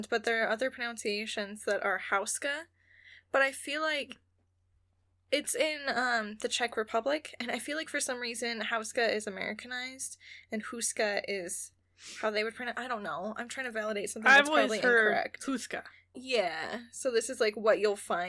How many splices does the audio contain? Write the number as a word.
one